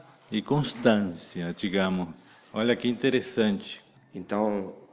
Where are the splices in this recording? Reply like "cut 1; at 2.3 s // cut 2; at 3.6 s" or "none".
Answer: cut 1; at 2.4 s // cut 2; at 4.0 s